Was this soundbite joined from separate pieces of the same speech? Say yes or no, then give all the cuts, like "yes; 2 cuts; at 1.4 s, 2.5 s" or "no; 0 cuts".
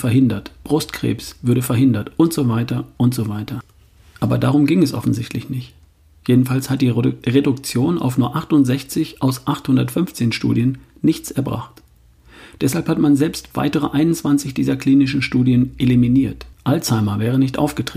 yes; 1 cut; at 16.5 s